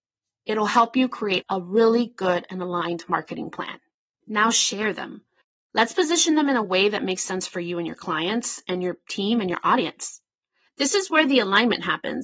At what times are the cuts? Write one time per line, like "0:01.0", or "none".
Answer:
0:04.2